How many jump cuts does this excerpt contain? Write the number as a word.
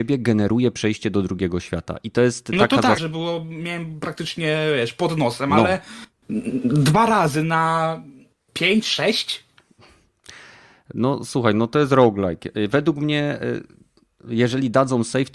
one